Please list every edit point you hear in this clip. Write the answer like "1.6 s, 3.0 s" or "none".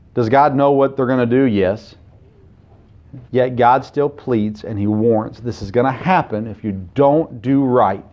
3.3 s

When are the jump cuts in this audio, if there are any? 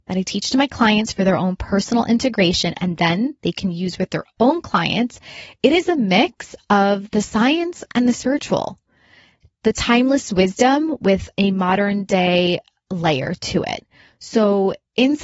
none

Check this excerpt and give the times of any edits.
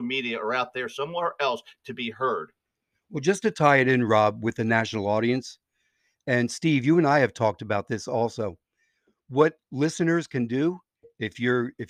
none

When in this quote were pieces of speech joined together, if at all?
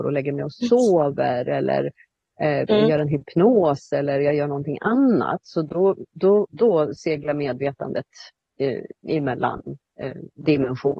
6.5 s

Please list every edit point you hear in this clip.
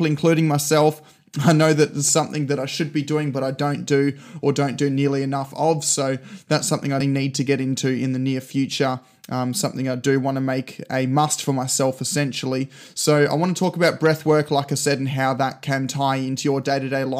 7.0 s

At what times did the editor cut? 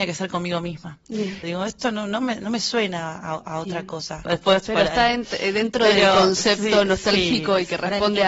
1.4 s, 4.3 s

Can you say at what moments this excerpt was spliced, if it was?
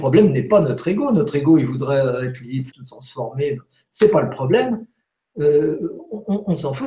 2.7 s

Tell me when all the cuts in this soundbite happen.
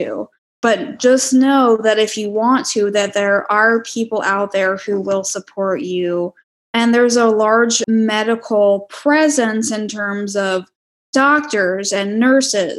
6.6 s, 7.8 s

